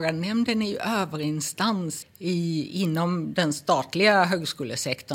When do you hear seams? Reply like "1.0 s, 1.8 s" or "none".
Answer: 2.0 s

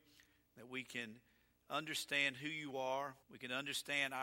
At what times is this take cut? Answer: 3.2 s

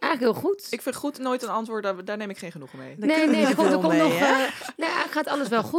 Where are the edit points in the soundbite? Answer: none

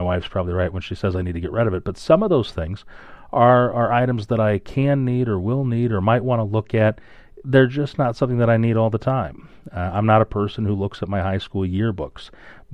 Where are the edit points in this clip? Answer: none

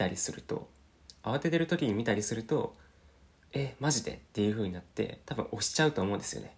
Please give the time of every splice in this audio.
none

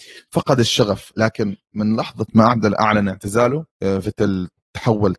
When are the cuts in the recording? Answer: 3.7 s

